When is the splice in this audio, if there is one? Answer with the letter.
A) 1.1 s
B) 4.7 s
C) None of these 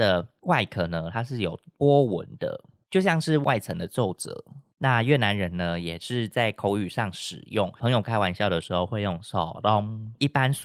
C